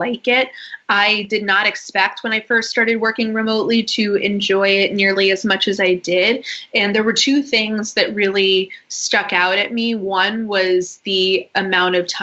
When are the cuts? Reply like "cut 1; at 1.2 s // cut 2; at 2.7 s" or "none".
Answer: none